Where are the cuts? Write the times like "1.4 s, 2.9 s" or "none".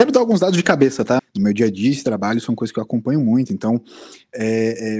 1.2 s